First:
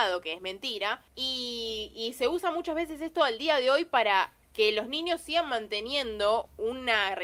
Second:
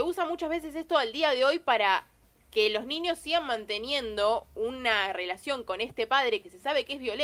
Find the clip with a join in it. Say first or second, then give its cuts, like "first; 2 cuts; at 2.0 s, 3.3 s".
first; 2 cuts; at 1.1 s, 4.4 s